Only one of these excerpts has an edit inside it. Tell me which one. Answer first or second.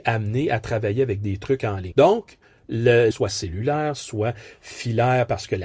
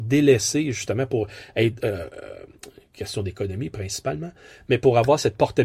first